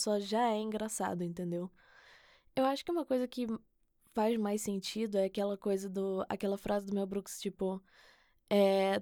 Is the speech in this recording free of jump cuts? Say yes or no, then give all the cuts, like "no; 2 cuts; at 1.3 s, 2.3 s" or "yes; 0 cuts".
yes; 0 cuts